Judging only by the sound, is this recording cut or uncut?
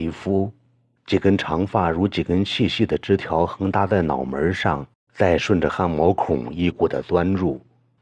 cut